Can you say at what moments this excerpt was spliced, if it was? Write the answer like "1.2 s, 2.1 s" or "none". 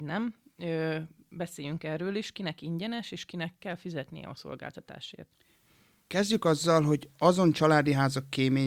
none